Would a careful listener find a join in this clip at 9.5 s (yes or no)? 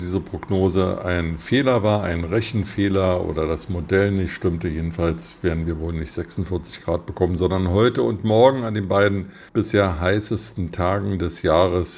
yes